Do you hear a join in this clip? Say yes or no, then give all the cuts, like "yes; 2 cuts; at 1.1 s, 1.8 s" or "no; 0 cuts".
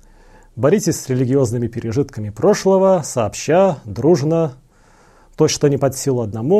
no; 0 cuts